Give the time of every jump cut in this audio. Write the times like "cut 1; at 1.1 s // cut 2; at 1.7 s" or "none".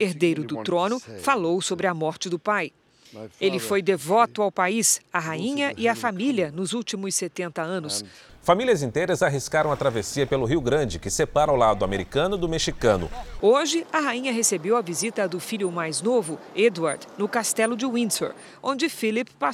cut 1; at 8.3 s // cut 2; at 13.4 s